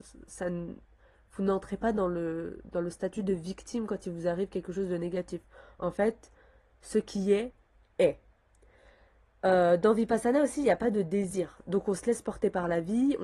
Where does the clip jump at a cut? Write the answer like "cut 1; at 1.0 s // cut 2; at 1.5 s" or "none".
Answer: none